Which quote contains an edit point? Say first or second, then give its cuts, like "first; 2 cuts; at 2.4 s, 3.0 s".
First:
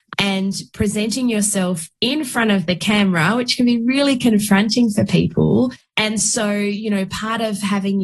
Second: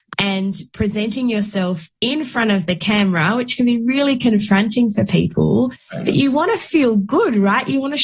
first; 1 cut; at 5.8 s